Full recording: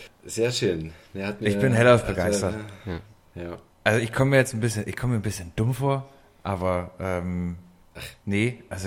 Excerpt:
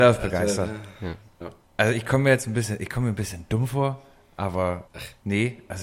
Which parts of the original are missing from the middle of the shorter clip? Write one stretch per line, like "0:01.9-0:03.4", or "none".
0:03.2-0:03.5
0:06.9-0:07.9